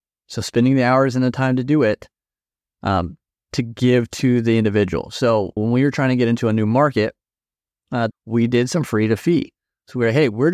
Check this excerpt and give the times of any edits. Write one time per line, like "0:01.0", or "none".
0:05.6
0:08.1